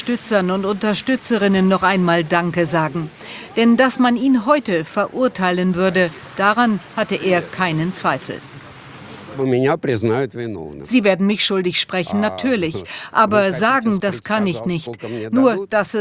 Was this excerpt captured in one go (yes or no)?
no